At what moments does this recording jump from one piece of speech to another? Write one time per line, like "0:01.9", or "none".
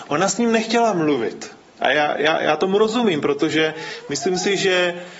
0:01.7

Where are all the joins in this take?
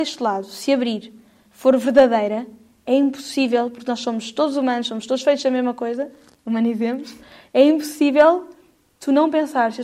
0:01.5

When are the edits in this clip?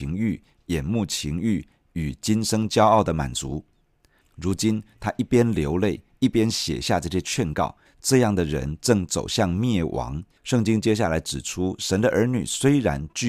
0:04.2
0:07.9
0:10.4

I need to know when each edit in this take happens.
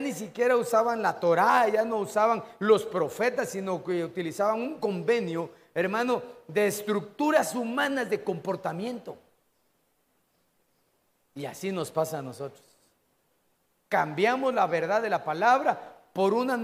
none

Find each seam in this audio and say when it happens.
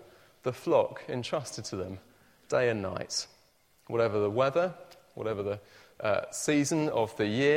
none

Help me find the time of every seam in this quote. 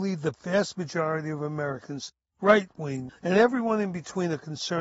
0:03.1

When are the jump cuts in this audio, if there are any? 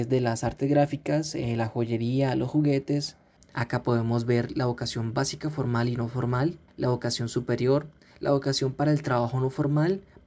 0:03.4
0:06.7

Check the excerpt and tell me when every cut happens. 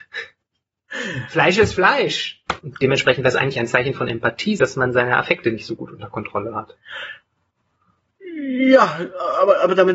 0:02.6
0:04.6

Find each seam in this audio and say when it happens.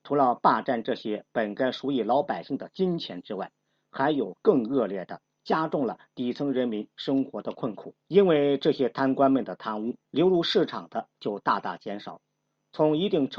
0:05.2
0:08.0
0:10.0

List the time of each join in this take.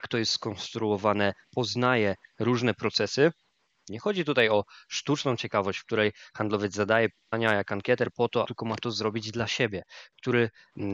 0:03.9
0:08.4

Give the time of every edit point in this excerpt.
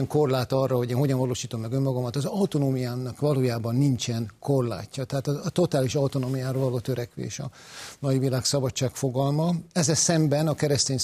none

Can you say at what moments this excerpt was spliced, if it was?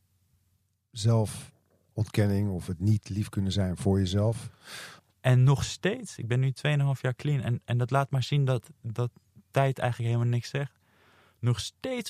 0:05.0

